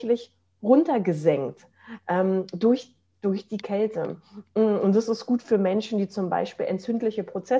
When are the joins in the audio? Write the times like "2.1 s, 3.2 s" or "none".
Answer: none